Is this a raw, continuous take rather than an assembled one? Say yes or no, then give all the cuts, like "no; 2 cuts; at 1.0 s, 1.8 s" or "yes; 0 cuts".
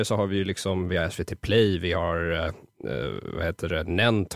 yes; 0 cuts